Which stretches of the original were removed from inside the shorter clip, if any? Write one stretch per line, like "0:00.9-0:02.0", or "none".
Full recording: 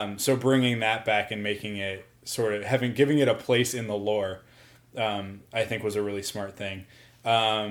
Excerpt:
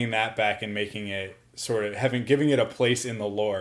none